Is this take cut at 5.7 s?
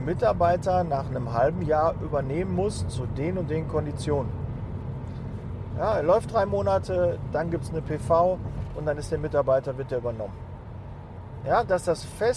yes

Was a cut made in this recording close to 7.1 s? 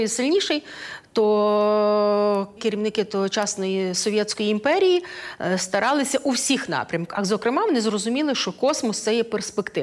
no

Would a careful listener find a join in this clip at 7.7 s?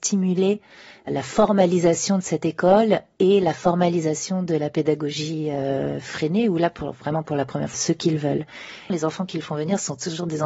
yes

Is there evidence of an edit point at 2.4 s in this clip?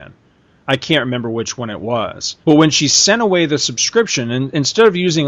yes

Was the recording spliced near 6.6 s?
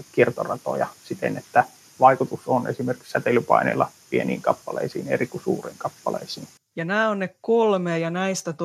yes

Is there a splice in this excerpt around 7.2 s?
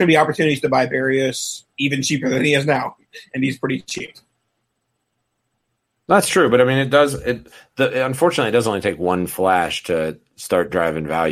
no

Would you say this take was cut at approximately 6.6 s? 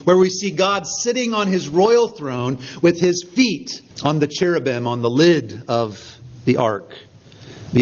no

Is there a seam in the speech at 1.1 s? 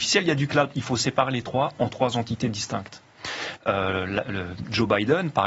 no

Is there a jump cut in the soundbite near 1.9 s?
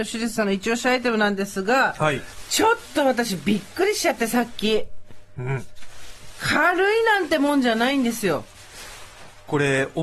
no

